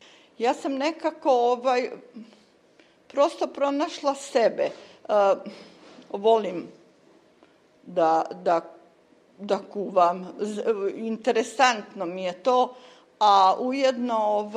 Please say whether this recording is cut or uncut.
uncut